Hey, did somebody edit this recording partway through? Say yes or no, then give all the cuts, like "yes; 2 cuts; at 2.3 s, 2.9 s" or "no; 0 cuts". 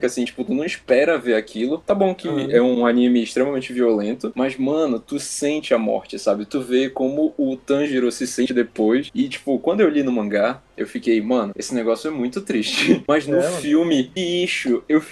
no; 0 cuts